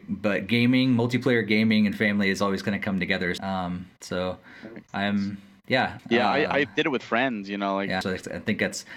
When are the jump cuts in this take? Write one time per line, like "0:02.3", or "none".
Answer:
0:03.4
0:06.0
0:08.0